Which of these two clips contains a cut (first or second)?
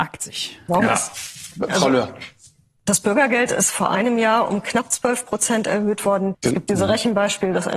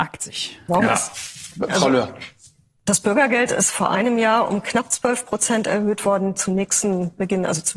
first